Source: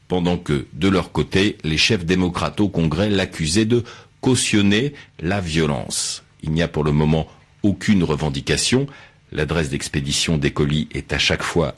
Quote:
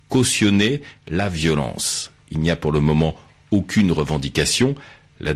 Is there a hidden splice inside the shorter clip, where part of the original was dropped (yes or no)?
no